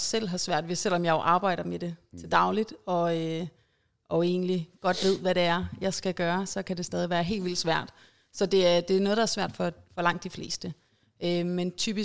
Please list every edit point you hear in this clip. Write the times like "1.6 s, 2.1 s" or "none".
none